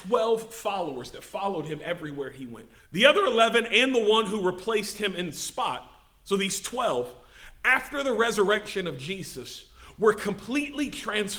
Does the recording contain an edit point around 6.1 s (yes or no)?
no